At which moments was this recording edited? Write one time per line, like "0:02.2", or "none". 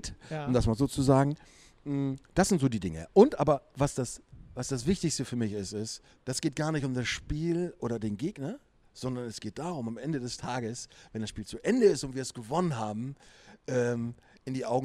0:06.2